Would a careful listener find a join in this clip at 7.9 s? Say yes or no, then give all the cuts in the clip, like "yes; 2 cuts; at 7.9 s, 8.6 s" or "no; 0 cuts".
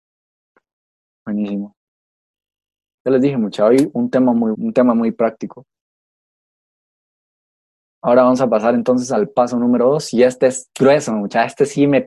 no; 1 cut; at 4.5 s